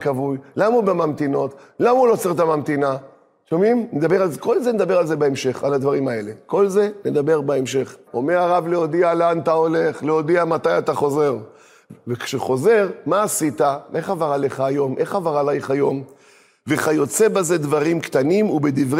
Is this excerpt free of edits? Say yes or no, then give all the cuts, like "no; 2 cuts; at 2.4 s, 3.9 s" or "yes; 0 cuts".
no; 1 cut; at 8.1 s